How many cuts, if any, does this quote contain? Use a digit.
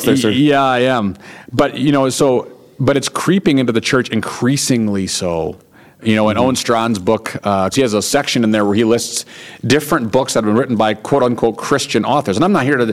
1